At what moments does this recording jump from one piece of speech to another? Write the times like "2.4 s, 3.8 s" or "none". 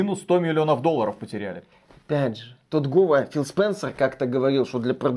none